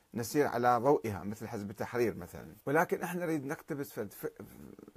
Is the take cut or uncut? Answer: cut